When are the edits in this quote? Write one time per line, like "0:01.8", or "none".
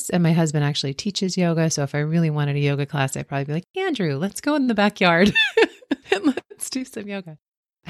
none